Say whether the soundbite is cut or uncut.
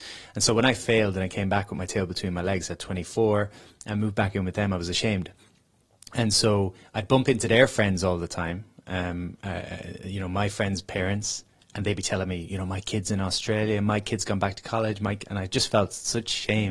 uncut